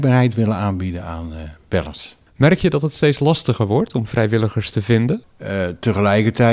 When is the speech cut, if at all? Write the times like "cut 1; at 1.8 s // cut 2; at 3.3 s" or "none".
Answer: cut 1; at 5.2 s